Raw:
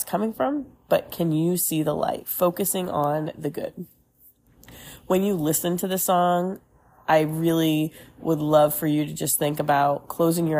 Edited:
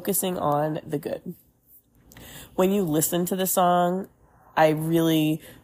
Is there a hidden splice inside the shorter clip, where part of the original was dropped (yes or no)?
no